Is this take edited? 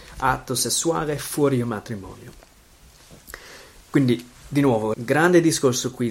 yes; 1 cut; at 4.9 s

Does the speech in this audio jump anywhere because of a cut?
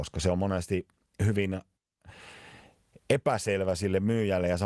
no; 0 cuts

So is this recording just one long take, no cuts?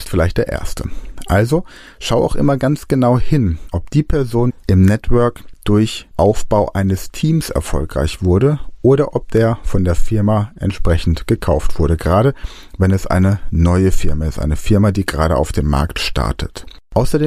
no; 1 cut; at 4.5 s

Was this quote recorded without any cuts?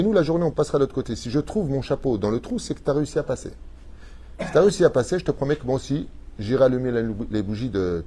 yes; 0 cuts

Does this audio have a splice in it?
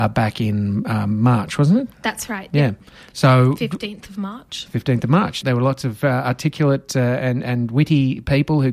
yes; 1 cut; at 5.4 s

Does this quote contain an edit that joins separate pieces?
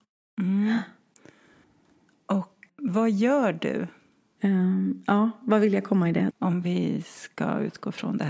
yes; 3 cuts; at 2.7 s, 4.4 s, 6.3 s

